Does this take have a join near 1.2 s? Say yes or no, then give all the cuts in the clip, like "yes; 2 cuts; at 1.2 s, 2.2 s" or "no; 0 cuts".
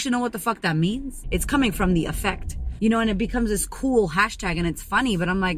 yes; 2 cuts; at 1.2 s, 2.8 s